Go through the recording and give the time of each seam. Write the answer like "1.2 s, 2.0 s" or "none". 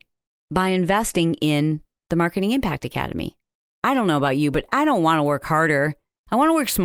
3.7 s